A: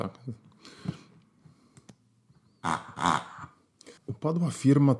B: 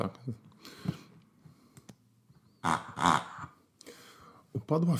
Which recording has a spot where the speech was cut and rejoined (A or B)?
A